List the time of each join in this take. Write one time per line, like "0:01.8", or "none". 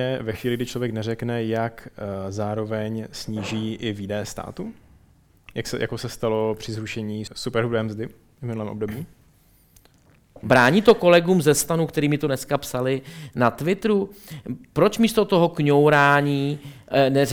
0:07.3
0:10.4